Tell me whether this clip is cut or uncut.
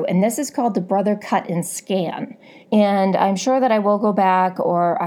cut